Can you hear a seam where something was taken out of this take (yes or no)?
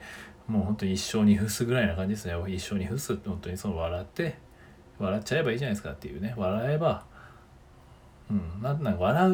no